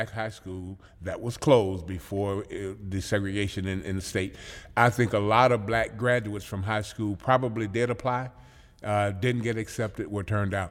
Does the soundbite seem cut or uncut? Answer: uncut